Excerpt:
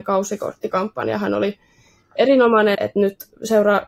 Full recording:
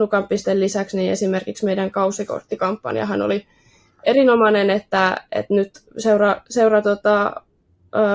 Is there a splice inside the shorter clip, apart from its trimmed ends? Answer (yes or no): yes